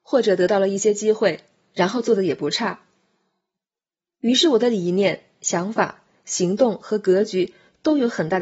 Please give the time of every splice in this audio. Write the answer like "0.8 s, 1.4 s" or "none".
none